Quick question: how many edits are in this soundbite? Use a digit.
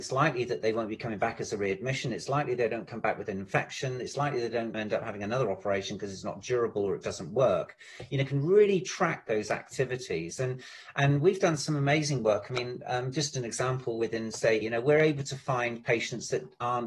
2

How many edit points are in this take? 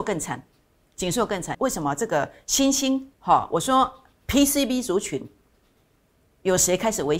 2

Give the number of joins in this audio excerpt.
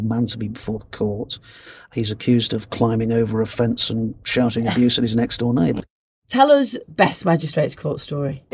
1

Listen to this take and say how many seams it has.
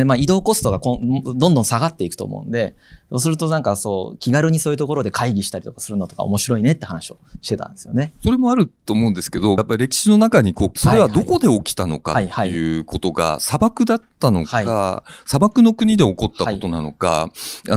2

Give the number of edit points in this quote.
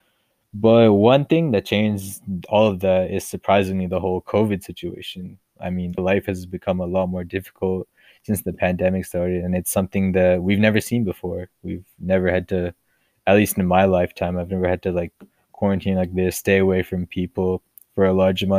1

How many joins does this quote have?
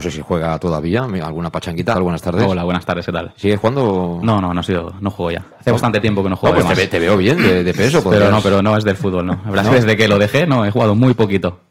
1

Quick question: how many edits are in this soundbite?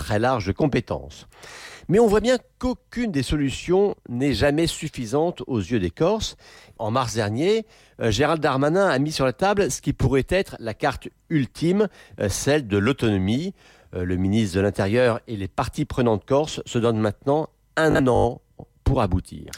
1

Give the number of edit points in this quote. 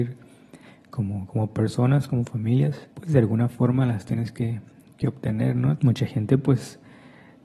2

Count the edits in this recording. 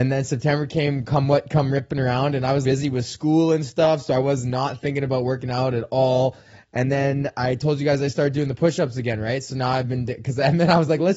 1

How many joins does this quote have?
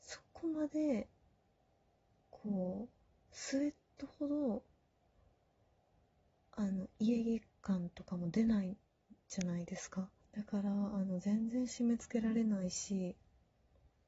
1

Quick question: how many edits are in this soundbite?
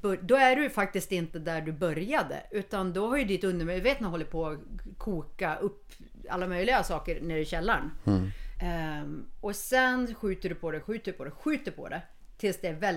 2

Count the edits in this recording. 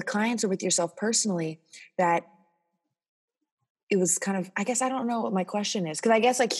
0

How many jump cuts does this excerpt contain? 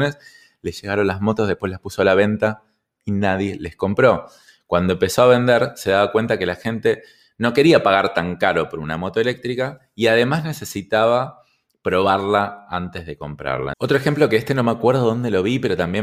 1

